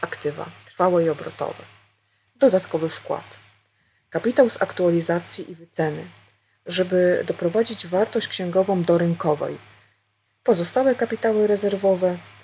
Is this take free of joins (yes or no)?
no